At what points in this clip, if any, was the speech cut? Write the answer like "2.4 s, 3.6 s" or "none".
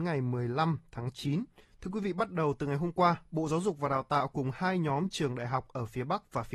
1.6 s

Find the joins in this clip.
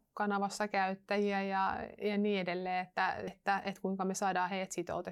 3.3 s

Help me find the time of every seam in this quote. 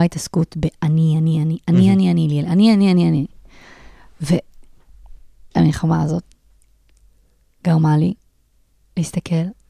none

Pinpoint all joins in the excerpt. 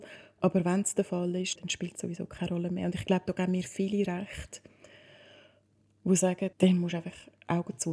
1.6 s, 6.5 s

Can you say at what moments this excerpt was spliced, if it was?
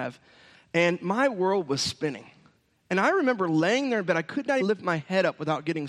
4.6 s

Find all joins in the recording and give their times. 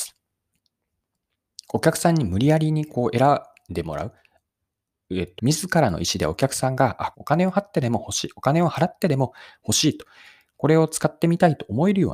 5.4 s, 7.1 s

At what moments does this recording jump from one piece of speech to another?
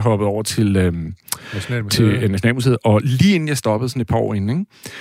none

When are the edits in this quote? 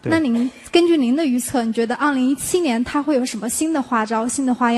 none

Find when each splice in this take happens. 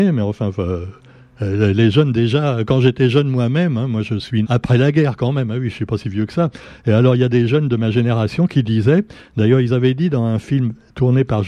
4.4 s

